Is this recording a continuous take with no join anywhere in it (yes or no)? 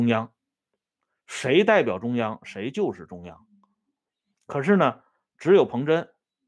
yes